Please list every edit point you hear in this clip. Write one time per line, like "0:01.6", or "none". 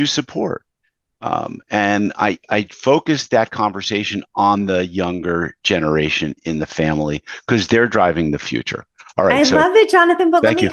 none